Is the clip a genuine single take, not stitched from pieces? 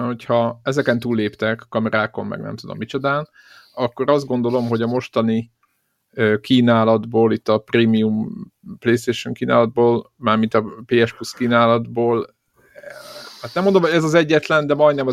yes; 0 cuts

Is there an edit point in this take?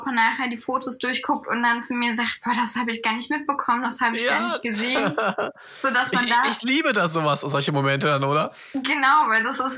no; 0 cuts

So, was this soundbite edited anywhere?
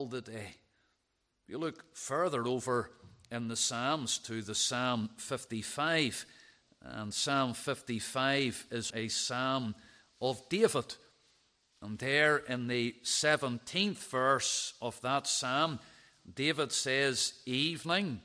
yes; 1 cut; at 8.9 s

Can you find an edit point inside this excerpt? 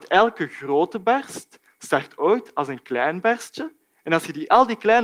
no; 0 cuts

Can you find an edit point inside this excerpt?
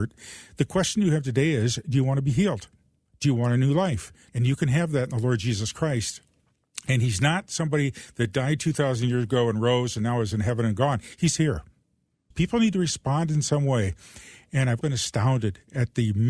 yes; 3 cuts; at 4.3 s, 12.3 s, 14.8 s

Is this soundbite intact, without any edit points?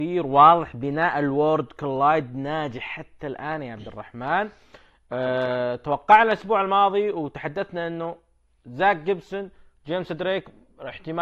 yes; 0 cuts

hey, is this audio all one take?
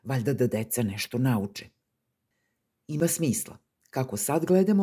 yes; 0 cuts

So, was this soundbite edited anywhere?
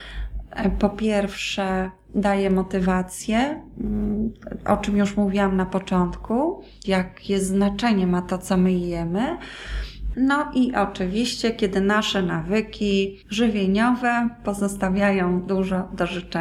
yes; 3 cuts; at 6.8 s, 10.1 s, 13.2 s

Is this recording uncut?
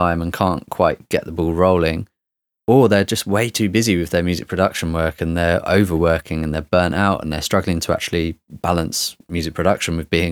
yes; 0 cuts

